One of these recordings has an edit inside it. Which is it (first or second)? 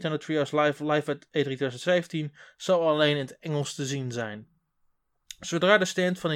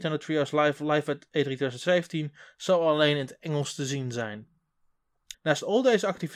second